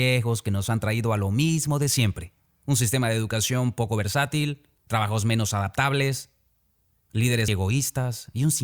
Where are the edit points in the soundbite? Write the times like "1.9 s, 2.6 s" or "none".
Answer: 4.8 s, 7.5 s